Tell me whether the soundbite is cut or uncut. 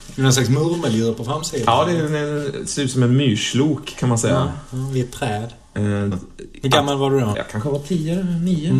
cut